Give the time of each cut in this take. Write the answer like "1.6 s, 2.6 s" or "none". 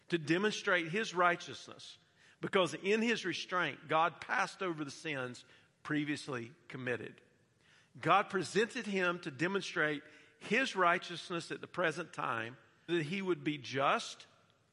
12.9 s